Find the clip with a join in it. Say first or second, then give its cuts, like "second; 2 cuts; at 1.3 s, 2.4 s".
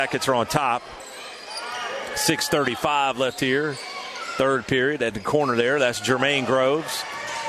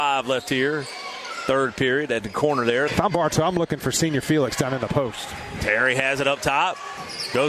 second; 1 cut; at 2.9 s